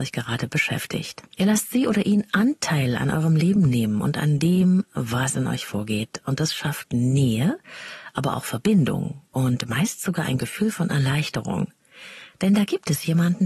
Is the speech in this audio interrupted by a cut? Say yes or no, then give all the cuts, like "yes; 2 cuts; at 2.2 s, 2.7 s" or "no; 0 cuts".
yes; 1 cut; at 1.3 s